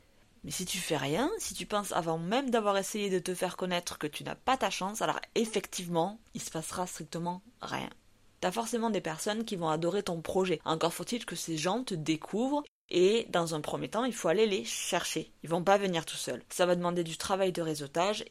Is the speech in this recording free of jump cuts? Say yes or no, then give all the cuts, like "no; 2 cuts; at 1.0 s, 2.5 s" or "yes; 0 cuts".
yes; 0 cuts